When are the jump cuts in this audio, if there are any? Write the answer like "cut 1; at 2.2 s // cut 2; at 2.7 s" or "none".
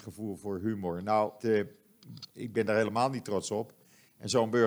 cut 1; at 1.4 s